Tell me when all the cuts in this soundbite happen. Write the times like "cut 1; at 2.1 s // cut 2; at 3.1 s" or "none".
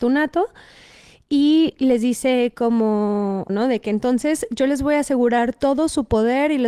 cut 1; at 3.5 s